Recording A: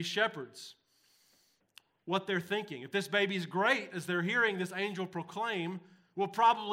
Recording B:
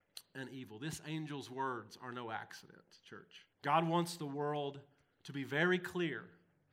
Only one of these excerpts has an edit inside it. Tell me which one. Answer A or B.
B